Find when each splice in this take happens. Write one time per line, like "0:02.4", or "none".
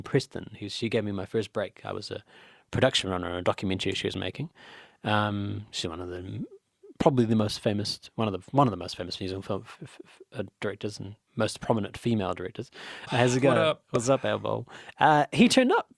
0:11.2
0:13.1
0:14.9